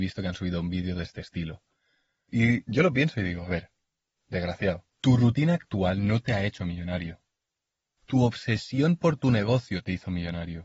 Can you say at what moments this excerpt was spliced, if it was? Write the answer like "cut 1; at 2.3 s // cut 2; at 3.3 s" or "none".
cut 1; at 4.9 s